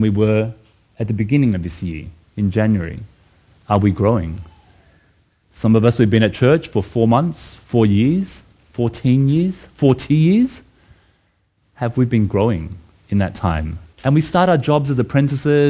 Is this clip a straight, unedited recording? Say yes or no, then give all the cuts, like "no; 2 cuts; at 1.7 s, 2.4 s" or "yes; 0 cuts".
no; 2 cuts; at 5.4 s, 13.9 s